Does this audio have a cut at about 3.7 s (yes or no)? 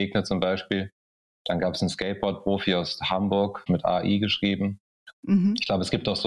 yes